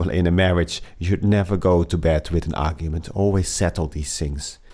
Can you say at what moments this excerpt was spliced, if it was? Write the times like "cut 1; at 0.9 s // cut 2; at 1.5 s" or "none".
none